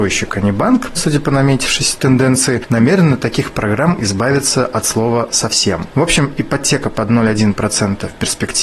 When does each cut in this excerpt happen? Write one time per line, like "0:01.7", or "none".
0:01.0